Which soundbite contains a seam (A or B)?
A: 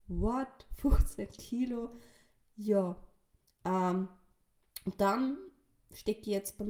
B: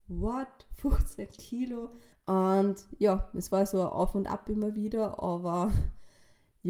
B